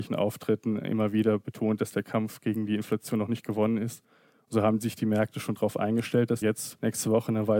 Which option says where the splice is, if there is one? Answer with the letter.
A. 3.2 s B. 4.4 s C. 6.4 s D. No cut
C